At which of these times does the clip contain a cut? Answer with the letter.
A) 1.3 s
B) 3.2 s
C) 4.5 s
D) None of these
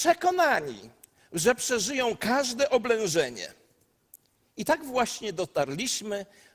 D